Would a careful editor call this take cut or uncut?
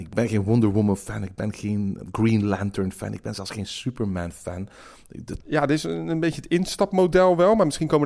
cut